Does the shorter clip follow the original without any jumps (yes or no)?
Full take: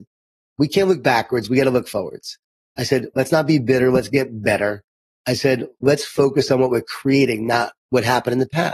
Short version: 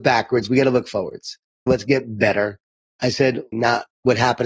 no